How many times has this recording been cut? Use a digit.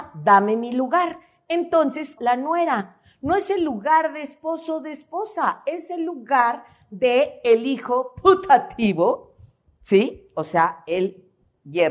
1